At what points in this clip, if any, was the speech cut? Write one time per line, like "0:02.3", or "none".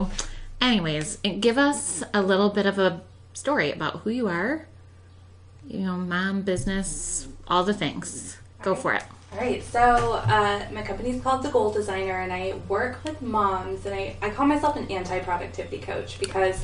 none